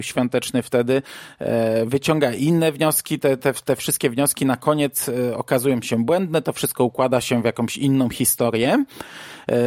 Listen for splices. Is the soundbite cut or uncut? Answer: uncut